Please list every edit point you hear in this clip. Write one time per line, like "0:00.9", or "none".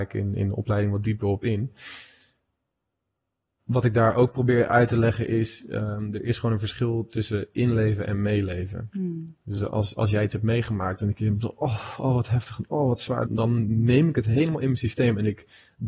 0:09.6
0:13.3

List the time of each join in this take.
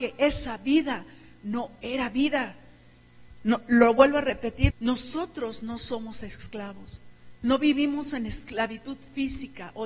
0:04.7

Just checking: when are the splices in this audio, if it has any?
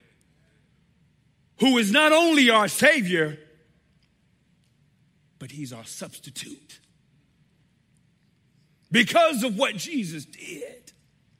none

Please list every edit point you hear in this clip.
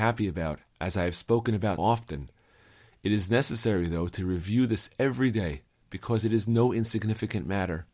0:01.8

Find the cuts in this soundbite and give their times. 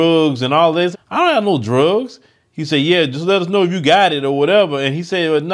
0:00.9

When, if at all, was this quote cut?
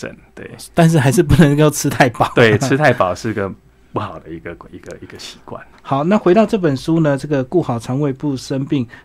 none

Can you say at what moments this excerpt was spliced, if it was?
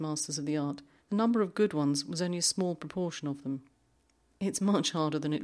0:01.0

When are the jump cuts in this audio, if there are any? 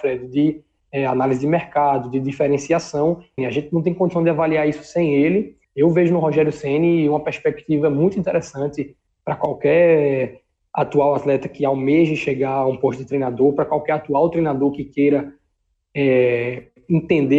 0:03.4
0:05.6

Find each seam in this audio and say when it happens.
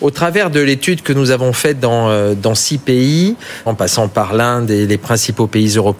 0:03.7

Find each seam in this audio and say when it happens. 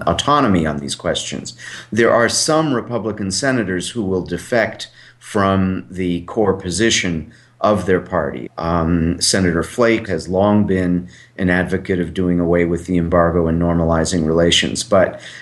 0:08.5
0:10.1

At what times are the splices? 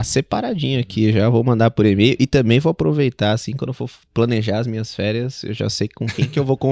none

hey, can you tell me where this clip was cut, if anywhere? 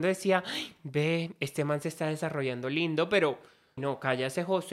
0:03.8

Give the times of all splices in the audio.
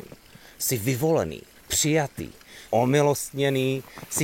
0:01.6
0:02.7

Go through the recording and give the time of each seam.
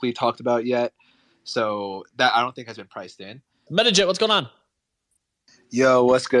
0:03.7

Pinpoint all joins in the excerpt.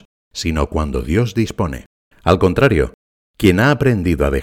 0:02.1

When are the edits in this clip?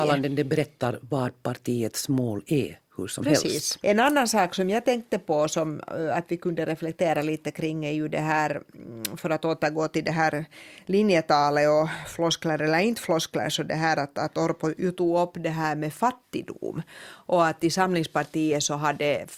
0:03.8

